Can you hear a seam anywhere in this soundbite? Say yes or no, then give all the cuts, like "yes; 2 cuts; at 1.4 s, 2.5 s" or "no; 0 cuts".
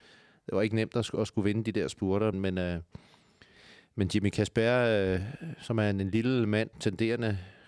yes; 2 cuts; at 2.3 s, 6.7 s